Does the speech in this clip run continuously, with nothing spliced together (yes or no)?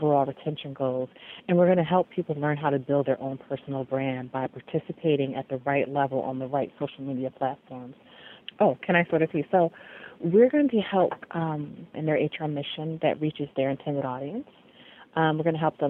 no